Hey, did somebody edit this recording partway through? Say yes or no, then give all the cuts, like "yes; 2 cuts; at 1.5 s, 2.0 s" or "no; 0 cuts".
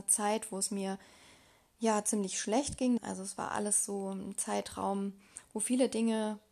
yes; 1 cut; at 3.0 s